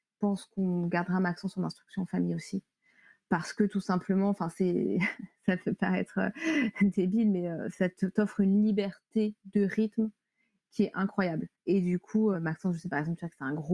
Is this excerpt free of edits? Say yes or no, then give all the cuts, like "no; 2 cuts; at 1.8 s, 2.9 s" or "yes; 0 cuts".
no; 1 cut; at 12.3 s